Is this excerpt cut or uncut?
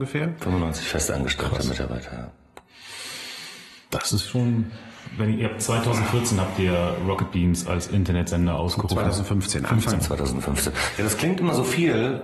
cut